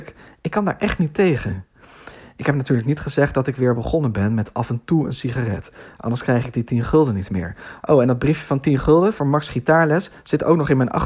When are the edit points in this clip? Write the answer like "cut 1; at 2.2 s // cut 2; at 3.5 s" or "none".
none